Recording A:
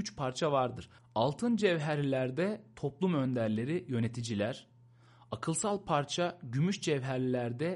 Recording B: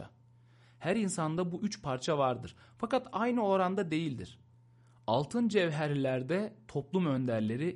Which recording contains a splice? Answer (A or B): A